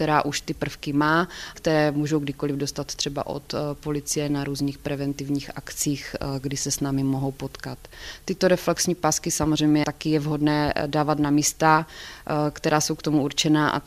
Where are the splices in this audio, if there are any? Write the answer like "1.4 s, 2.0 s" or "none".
1.5 s